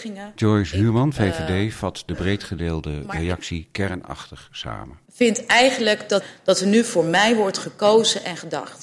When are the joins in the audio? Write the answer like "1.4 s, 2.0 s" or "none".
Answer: none